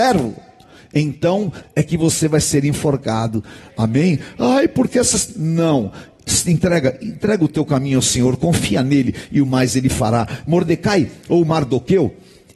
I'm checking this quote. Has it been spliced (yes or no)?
yes